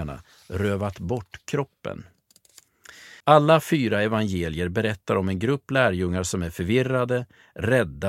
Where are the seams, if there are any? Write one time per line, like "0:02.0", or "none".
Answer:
0:03.2